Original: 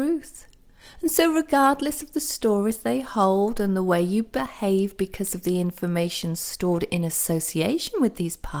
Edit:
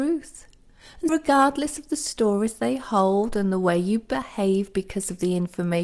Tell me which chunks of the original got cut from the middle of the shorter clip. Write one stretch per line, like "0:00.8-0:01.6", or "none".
0:01.1-0:01.3